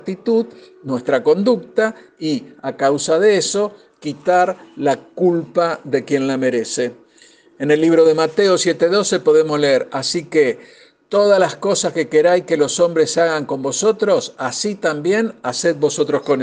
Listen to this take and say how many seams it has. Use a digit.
0